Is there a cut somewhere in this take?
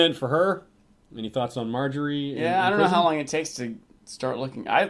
no; 0 cuts

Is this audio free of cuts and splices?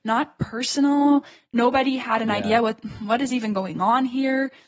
yes; 0 cuts

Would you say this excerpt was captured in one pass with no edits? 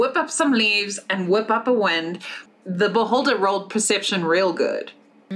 no; 1 cut; at 2.5 s

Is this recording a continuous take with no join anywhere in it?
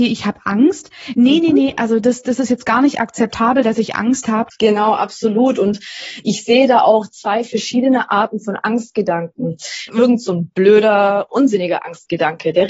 no; 3 cuts; at 4.5 s, 9.9 s, 11.3 s

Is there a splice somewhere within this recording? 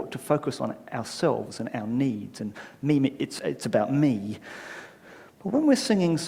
no; 0 cuts

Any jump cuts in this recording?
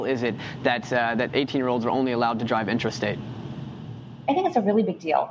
no; 0 cuts

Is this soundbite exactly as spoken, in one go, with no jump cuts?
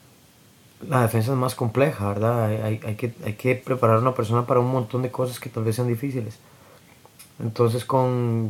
yes; 0 cuts

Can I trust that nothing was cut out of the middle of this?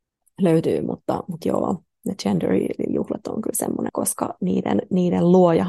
no; 1 cut; at 3.9 s

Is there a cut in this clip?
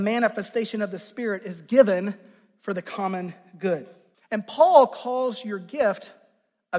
yes; 1 cut; at 4.1 s

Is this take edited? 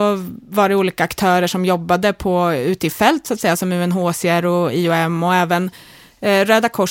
no; 0 cuts

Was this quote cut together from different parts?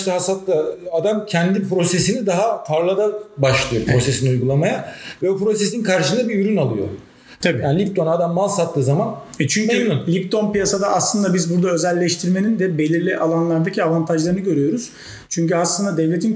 yes; 1 cut; at 7.4 s

